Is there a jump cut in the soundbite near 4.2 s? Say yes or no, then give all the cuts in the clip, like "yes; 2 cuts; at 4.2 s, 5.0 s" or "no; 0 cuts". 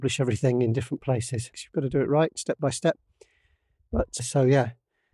yes; 2 cuts; at 1.5 s, 4.2 s